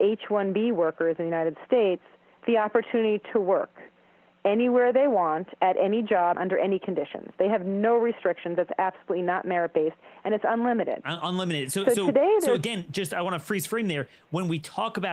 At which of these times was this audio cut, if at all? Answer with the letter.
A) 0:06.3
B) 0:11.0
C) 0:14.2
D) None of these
A